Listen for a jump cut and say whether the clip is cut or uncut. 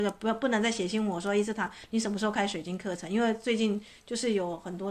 uncut